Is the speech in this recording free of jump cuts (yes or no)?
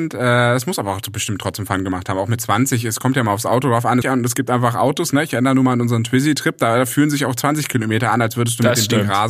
no